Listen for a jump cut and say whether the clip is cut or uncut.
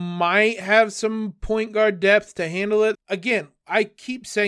cut